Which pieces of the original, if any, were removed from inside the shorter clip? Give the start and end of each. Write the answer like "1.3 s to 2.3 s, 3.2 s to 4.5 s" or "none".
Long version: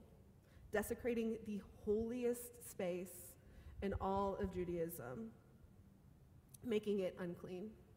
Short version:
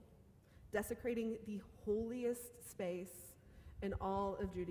none